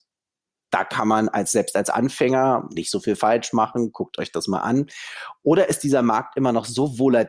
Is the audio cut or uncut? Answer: uncut